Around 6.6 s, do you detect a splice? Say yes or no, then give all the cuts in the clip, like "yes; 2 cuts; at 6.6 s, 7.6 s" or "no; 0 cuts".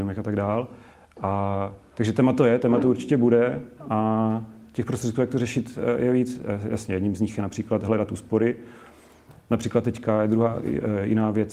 no; 0 cuts